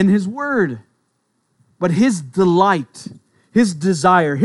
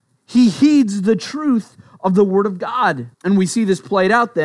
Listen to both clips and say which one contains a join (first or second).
second